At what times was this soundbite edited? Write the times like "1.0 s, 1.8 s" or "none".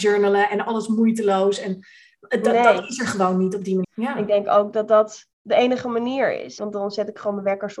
3.8 s, 5.3 s, 6.6 s